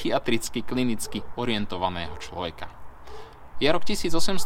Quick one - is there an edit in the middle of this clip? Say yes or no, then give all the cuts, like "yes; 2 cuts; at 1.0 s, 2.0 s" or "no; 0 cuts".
yes; 1 cut; at 3.5 s